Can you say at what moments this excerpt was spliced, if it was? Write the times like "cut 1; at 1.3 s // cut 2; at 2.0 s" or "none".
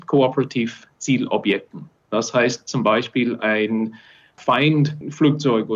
none